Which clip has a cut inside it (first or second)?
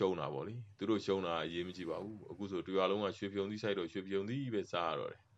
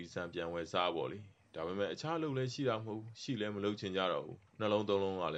second